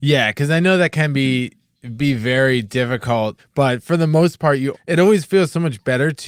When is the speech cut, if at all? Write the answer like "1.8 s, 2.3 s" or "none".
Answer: 3.4 s, 4.7 s